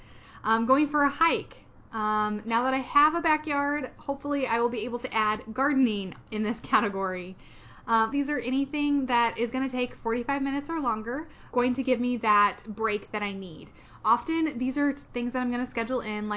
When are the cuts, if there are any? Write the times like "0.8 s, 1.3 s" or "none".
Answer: 8.1 s, 11.5 s